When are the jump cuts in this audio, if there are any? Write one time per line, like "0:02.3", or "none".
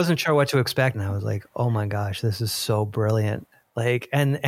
0:00.9